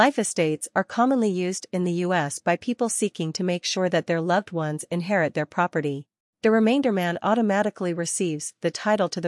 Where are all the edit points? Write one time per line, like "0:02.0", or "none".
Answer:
0:06.3